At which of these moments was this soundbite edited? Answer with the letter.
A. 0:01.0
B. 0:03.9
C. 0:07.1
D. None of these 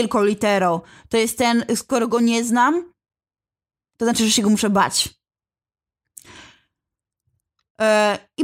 D